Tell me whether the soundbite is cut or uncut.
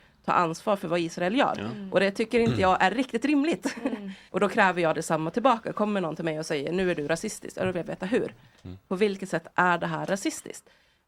cut